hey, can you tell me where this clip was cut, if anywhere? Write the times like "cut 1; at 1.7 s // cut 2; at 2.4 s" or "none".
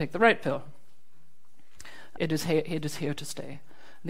cut 1; at 2.1 s